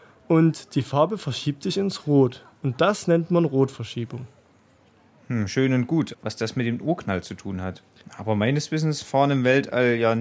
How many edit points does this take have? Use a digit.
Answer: 2